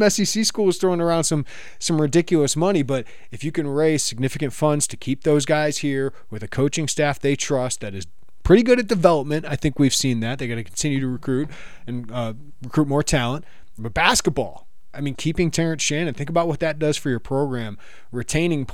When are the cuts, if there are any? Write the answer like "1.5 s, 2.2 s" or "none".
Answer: 13.8 s, 15.1 s